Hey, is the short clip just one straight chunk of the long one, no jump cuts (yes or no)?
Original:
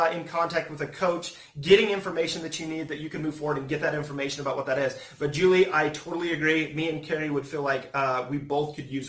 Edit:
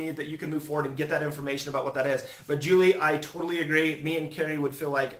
yes